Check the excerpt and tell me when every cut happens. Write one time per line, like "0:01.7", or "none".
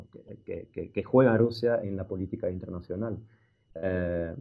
0:01.8